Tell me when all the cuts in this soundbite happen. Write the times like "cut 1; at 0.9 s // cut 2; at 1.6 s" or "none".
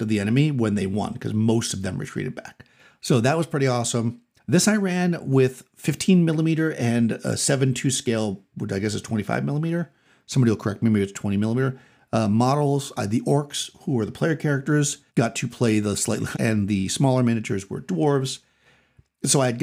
cut 1; at 4.4 s // cut 2; at 15.1 s // cut 3; at 16.3 s